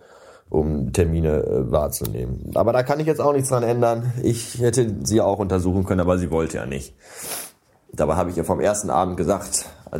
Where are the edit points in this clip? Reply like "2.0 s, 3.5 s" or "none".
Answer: none